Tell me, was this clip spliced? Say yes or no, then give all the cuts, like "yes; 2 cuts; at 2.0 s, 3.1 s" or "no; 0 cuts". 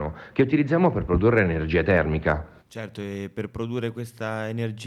yes; 1 cut; at 2.6 s